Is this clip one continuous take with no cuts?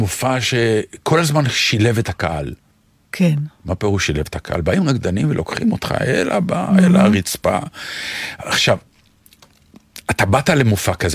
yes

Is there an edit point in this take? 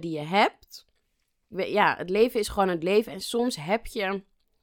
yes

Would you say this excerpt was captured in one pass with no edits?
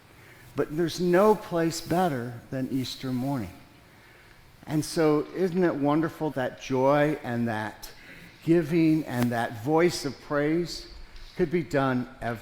no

